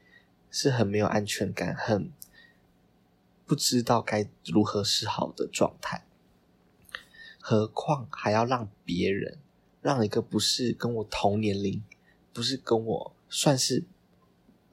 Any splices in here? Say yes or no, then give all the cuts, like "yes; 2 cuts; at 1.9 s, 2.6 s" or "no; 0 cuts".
yes; 2 cuts; at 7.4 s, 13.2 s